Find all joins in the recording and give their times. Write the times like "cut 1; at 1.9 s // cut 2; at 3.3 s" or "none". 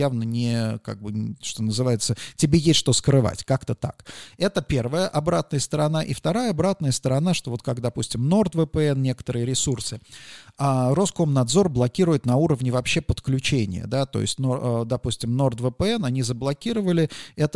none